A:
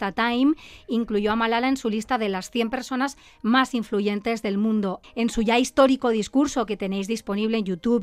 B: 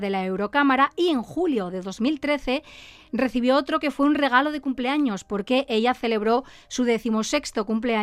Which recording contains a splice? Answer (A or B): A